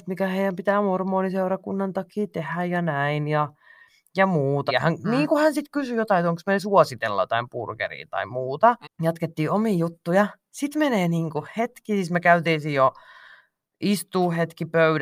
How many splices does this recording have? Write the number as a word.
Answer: two